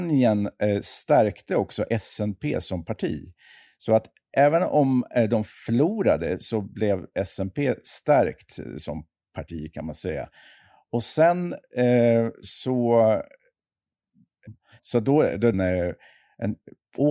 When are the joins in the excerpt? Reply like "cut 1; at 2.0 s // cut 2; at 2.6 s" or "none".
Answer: cut 1; at 14.5 s // cut 2; at 15.5 s